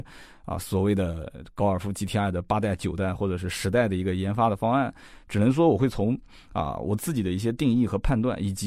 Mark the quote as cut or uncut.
uncut